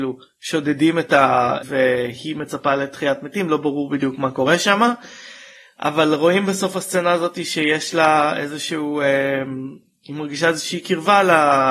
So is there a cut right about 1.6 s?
yes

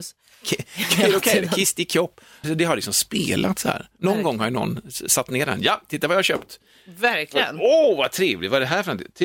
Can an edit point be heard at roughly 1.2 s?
no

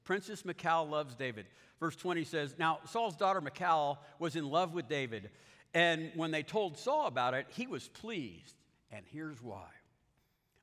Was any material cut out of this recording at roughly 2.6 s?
no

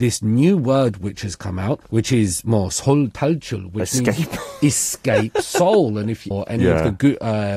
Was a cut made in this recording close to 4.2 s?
no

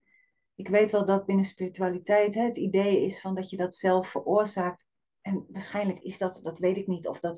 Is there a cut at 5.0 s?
yes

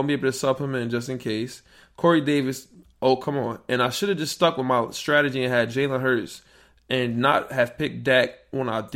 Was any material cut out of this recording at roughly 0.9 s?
no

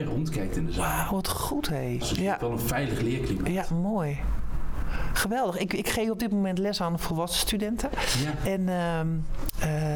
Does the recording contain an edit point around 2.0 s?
yes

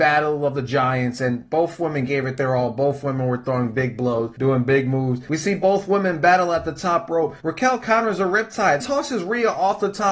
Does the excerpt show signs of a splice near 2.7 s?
no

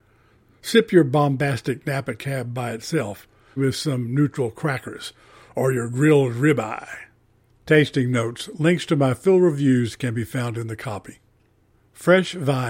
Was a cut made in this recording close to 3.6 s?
yes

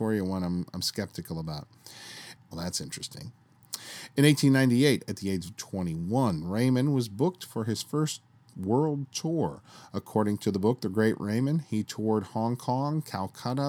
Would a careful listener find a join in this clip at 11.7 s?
no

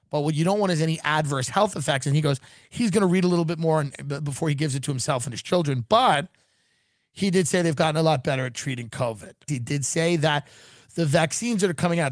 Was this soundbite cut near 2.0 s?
no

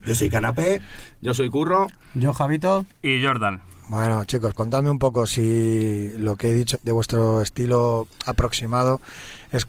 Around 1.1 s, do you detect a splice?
no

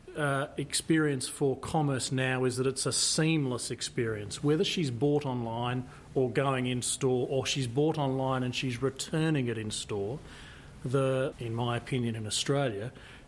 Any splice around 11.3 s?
yes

